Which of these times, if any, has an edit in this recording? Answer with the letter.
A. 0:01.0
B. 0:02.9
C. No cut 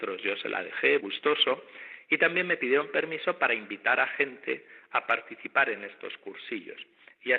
A